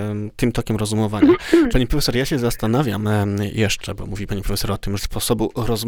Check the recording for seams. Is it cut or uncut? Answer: cut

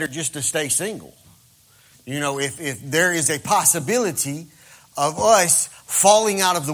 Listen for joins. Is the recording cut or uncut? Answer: uncut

